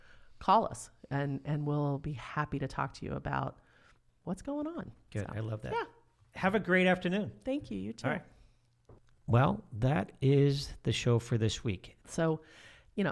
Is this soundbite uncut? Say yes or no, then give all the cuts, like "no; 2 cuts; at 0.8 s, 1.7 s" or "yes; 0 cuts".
no; 1 cut; at 12.0 s